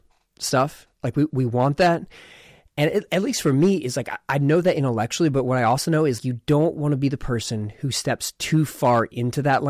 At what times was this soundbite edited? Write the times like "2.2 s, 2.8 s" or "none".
6.2 s